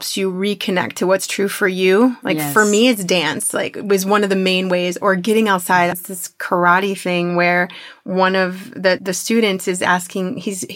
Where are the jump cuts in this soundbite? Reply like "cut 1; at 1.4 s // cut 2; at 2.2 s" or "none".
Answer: cut 1; at 5.9 s // cut 2; at 9.0 s